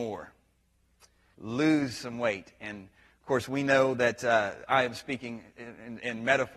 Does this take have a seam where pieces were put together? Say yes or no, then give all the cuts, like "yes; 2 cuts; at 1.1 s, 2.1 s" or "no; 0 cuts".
yes; 1 cut; at 1.3 s